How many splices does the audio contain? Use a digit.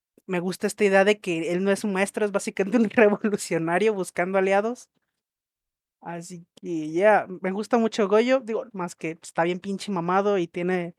1